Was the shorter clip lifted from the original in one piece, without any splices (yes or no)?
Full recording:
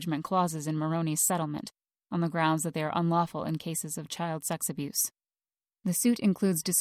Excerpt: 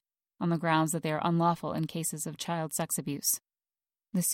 yes